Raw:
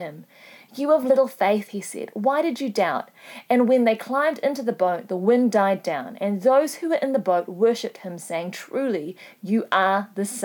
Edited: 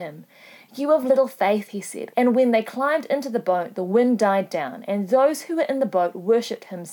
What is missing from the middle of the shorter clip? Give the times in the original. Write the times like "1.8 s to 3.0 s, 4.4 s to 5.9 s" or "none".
2.1 s to 3.4 s